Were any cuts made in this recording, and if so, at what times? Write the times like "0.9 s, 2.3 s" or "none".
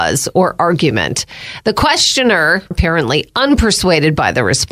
2.7 s

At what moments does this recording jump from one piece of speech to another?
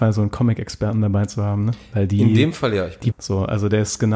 3.1 s

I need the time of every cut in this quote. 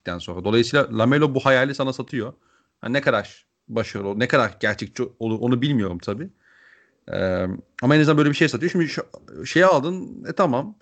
none

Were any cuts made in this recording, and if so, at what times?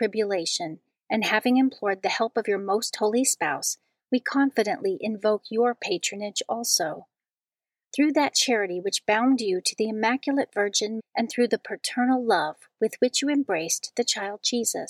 11.0 s

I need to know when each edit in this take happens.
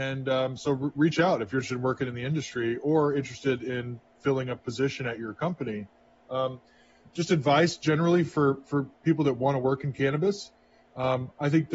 none

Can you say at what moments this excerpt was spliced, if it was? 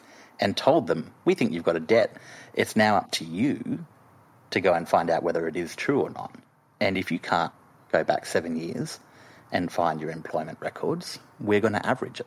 none

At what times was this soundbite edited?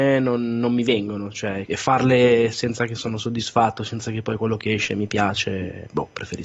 1.7 s

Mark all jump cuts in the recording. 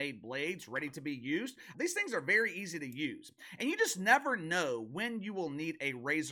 1.7 s

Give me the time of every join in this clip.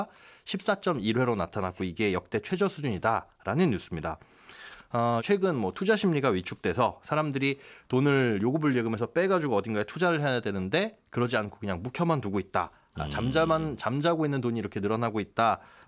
5.2 s

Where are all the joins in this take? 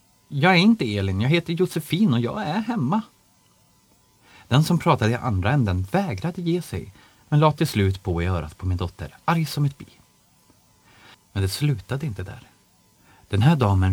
11.1 s

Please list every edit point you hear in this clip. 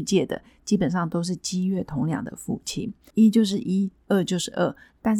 3.1 s

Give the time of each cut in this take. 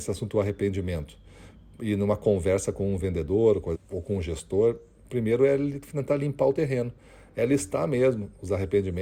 3.7 s

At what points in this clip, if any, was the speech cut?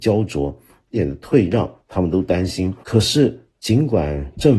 0.9 s, 2.8 s

